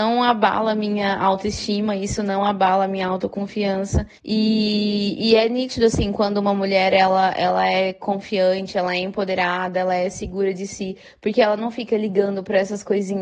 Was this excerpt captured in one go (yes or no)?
no